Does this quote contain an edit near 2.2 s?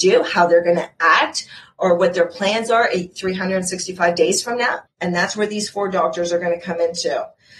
no; 1 cut; at 4.9 s

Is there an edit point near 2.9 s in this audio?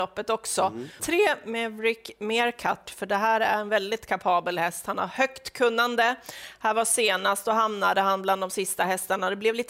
yes; 2 cuts; at 1.0 s, 2.9 s

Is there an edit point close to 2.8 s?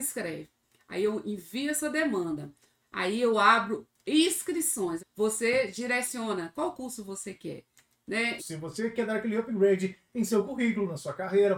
yes; 3 cuts; at 2.8 s, 5.0 s, 8.4 s

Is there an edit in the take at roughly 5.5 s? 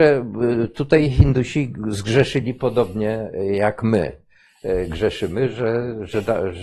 no; 0 cuts

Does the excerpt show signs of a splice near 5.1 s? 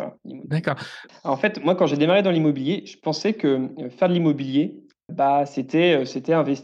yes; 2 cuts; at 1.1 s, 5.1 s

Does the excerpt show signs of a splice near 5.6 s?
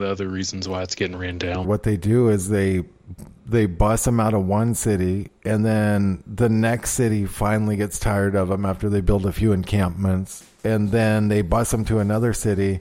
no; 1 cut; at 1.6 s

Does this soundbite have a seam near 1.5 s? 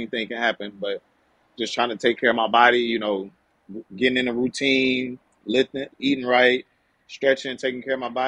no; 1 cut; at 5.9 s

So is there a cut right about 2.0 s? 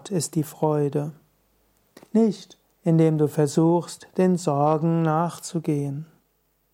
yes; 1 cut; at 2.0 s

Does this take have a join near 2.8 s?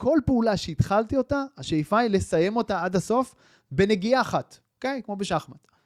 no; 1 cut; at 4.7 s

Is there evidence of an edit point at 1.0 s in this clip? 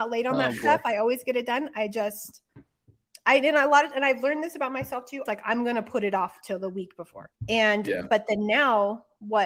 no; 2 cuts; at 5.3 s, 7.3 s

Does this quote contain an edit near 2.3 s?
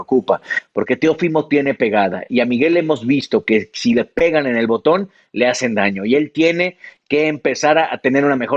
no; 0 cuts

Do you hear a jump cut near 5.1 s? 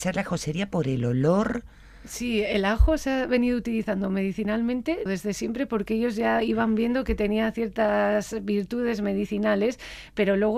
yes; 1 cut; at 5.1 s

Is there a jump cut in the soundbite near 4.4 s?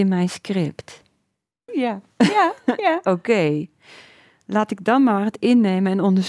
no; 1 cut; at 1.7 s

